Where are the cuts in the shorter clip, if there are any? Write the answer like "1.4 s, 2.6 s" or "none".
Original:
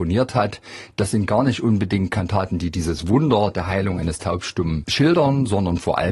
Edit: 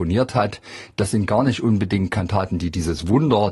none

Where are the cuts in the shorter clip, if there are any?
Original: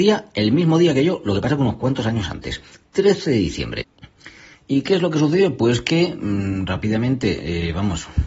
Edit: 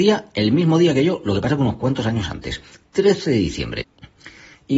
none

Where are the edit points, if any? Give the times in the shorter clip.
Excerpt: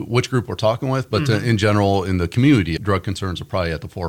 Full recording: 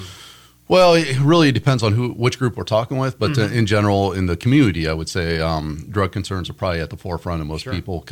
2.8 s

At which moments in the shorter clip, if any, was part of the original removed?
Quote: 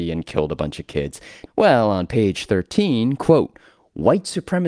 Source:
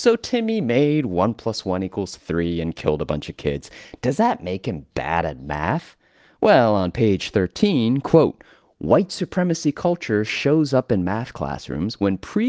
1.5 s

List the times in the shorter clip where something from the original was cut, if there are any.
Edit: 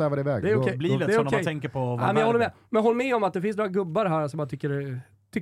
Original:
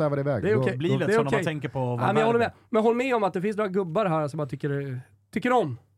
none

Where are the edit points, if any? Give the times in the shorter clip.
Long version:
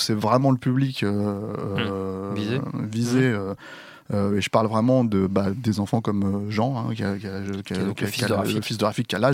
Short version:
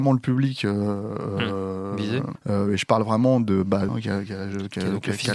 2.4 s, 3.9 s

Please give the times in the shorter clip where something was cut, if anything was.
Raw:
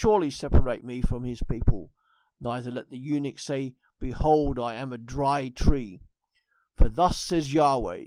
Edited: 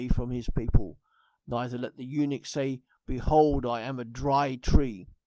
none

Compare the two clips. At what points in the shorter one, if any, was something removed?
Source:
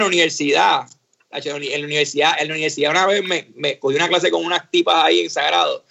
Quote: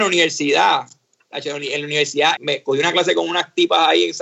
2.4 s

